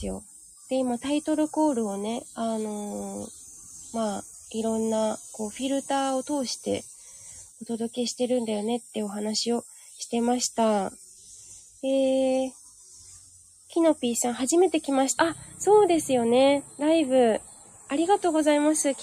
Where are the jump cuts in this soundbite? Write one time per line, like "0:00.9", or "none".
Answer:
0:15.2

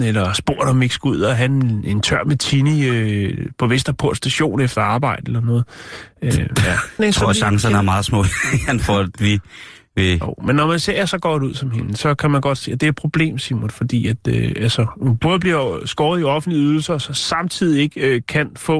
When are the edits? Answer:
0:07.0

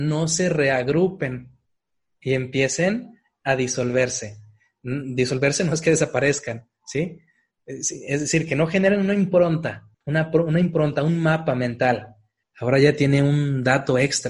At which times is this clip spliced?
0:09.9
0:12.4

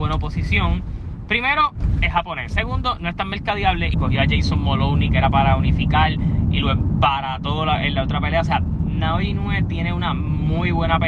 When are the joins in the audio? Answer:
0:03.9

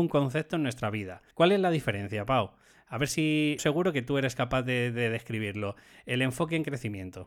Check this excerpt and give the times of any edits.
0:01.3
0:03.6

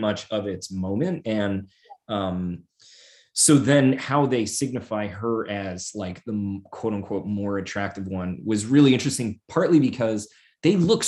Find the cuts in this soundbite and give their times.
none

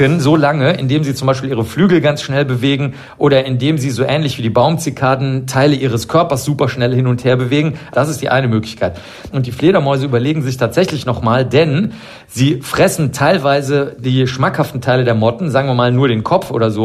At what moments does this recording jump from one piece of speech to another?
0:07.9
0:09.3

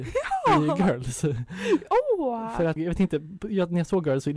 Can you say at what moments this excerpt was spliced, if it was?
0:02.8

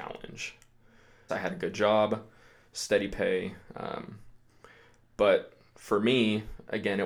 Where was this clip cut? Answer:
0:01.3

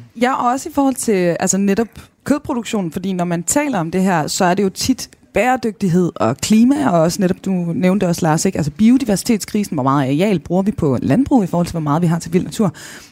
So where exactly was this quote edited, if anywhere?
none

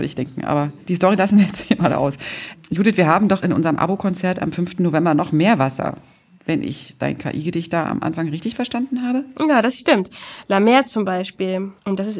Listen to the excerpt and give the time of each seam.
none

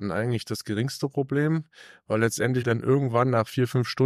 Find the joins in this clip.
0:02.6

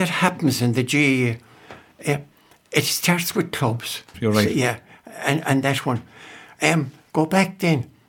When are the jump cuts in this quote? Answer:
0:04.1

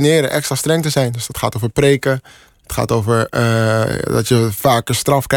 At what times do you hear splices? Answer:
none

